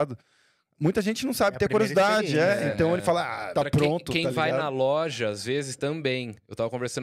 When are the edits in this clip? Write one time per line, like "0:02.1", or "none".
0:03.6